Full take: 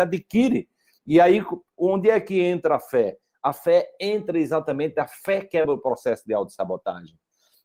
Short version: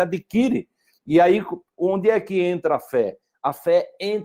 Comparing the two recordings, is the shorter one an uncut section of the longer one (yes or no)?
yes